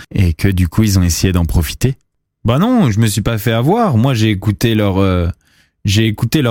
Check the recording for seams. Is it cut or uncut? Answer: uncut